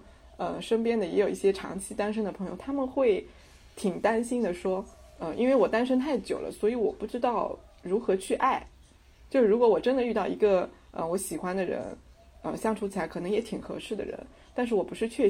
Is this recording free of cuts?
yes; 0 cuts

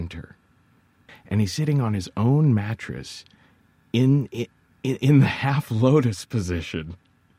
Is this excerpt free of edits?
no; 1 cut; at 1.1 s

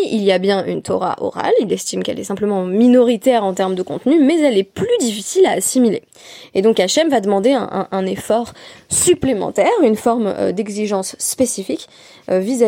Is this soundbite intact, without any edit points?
yes; 0 cuts

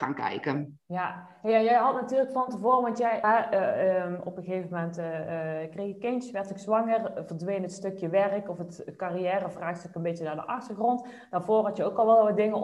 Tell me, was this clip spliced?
yes; 1 cut; at 3.2 s

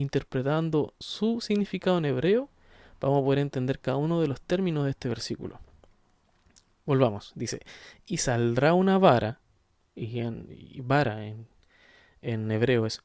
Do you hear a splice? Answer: no; 0 cuts

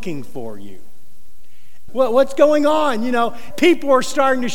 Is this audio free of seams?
no; 2 cuts; at 1.9 s, 3.5 s

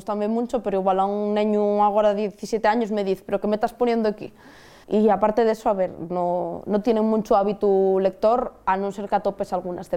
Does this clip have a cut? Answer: yes; 1 cut; at 4.8 s

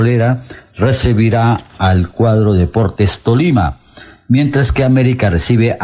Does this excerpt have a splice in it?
no; 0 cuts

